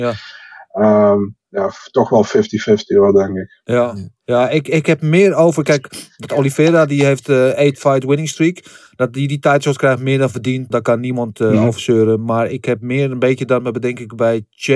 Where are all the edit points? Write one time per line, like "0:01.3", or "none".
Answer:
0:10.7